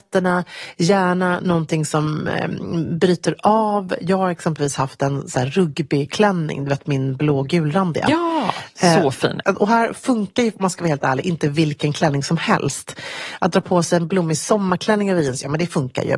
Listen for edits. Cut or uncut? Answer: cut